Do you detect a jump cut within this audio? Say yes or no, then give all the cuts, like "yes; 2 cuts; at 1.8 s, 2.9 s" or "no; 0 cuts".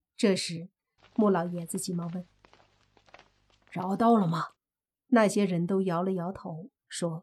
yes; 2 cuts; at 1.0 s, 4.6 s